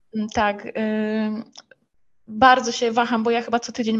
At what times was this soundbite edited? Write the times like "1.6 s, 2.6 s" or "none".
none